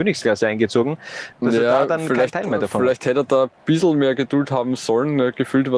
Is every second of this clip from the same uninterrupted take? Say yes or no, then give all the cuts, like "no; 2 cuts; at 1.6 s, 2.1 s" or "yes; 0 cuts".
no; 1 cut; at 1.3 s